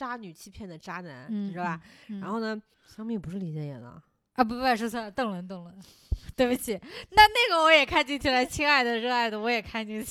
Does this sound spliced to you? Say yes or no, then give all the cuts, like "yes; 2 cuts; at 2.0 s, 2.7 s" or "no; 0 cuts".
yes; 1 cut; at 2.7 s